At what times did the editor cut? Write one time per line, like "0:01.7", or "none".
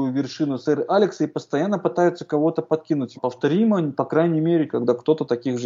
0:03.1
0:04.7